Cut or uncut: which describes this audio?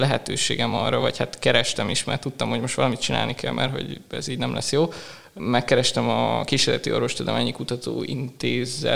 uncut